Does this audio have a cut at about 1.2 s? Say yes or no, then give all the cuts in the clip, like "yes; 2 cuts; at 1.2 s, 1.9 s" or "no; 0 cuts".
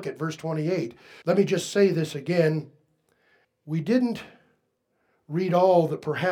yes; 2 cuts; at 1.2 s, 3.4 s